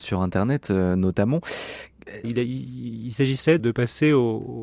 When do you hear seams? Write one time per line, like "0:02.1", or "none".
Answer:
0:02.2
0:03.6